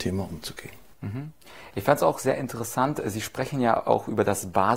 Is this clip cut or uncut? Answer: uncut